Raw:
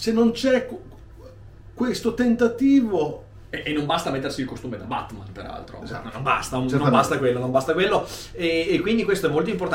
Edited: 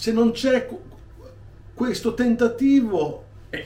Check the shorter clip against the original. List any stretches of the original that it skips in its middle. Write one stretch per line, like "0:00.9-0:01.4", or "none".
none